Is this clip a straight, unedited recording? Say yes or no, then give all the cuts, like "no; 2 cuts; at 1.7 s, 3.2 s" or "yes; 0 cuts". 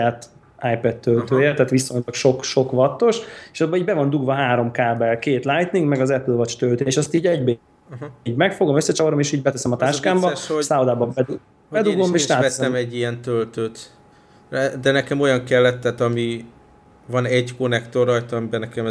yes; 0 cuts